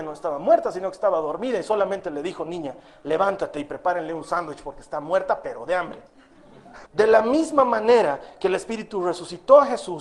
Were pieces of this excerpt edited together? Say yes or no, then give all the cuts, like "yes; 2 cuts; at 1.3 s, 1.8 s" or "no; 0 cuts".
yes; 1 cut; at 6.8 s